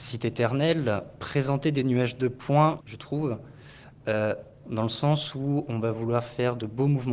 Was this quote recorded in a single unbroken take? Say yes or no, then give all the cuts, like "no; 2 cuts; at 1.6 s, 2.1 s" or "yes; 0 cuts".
no; 2 cuts; at 2.8 s, 4.6 s